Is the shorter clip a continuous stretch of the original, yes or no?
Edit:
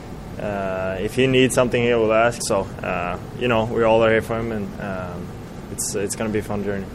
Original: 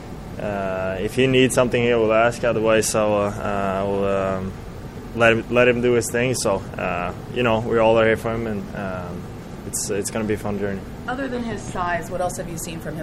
no